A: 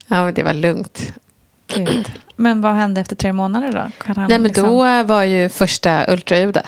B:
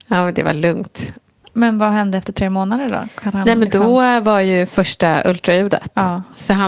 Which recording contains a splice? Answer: B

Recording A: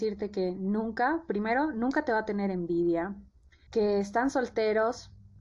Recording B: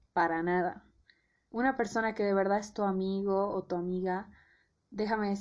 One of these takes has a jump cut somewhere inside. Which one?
A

